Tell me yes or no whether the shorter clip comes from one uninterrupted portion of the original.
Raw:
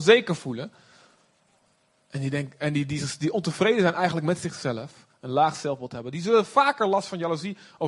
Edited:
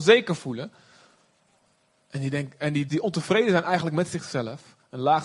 no